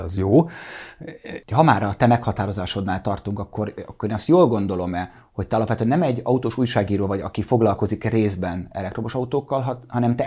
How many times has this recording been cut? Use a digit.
1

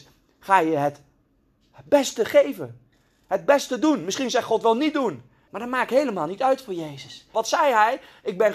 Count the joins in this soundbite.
2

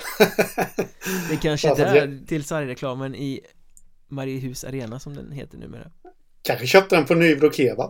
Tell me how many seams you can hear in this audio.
1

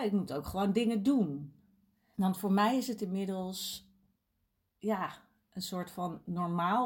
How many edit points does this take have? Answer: 1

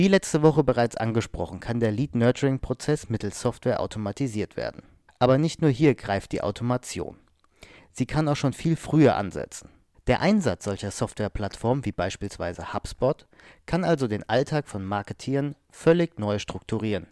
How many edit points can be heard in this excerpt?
1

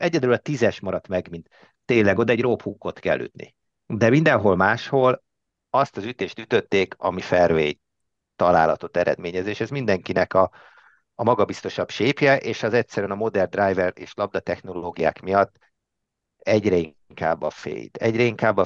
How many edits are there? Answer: 1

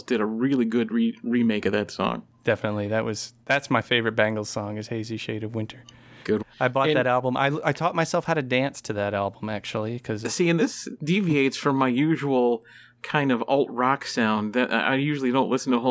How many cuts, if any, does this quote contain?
1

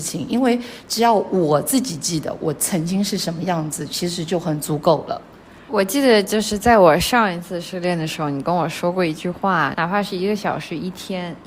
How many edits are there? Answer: 2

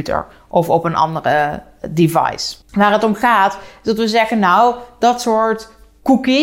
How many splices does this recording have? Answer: 1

